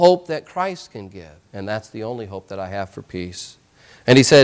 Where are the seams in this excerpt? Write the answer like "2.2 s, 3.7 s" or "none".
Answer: 1.5 s